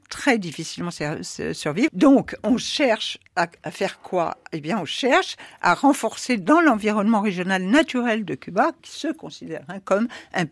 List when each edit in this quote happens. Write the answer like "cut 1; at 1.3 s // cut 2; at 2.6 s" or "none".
cut 1; at 1.9 s // cut 2; at 8.8 s

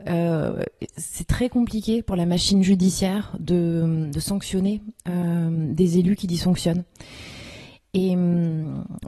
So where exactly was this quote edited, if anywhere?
none

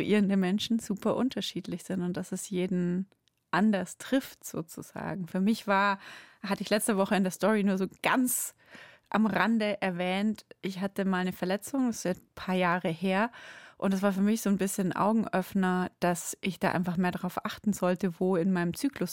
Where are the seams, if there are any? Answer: cut 1; at 12.1 s

